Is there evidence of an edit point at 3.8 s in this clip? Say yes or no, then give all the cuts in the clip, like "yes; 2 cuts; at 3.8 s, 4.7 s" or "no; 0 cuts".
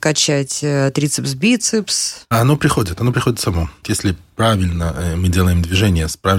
yes; 1 cut; at 3.8 s